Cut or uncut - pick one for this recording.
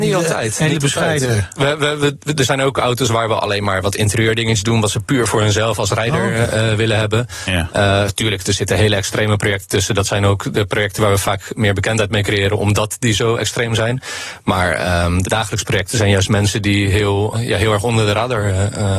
cut